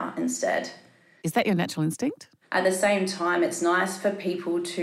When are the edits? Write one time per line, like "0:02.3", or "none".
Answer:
0:01.2
0:02.4